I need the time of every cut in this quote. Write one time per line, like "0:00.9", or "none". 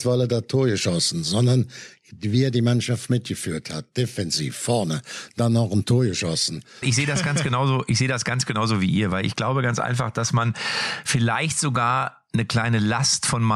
0:06.8